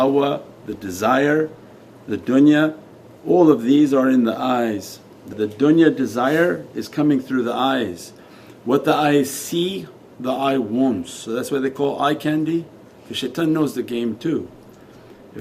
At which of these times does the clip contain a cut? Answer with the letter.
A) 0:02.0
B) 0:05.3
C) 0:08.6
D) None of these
B